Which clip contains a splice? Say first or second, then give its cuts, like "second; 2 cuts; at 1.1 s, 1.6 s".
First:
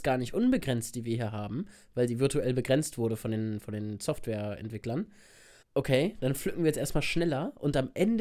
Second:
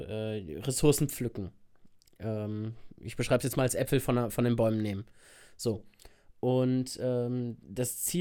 first; 1 cut; at 5.6 s